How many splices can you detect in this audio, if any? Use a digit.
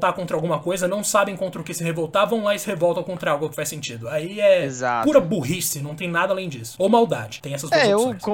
0